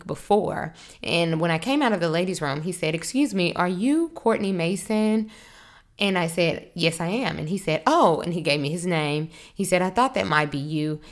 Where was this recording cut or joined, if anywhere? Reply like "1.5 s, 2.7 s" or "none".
none